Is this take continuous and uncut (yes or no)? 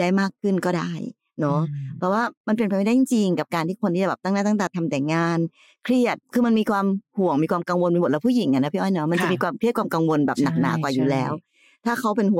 no